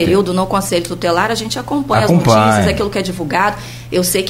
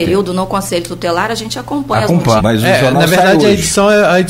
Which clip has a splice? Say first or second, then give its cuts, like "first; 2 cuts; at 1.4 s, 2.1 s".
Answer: second; 1 cut; at 2.4 s